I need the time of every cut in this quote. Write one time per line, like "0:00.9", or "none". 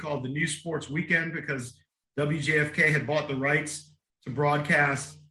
none